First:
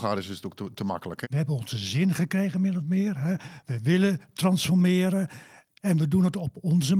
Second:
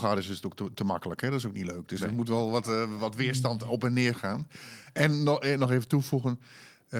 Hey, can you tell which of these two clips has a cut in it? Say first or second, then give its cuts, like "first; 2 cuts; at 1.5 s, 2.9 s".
first; 1 cut; at 1.2 s